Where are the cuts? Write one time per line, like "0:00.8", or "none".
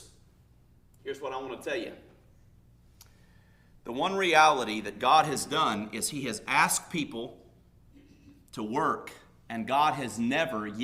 none